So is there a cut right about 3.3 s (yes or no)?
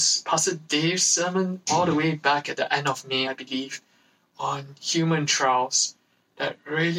no